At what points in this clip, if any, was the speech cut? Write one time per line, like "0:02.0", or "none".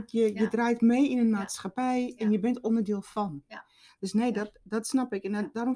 none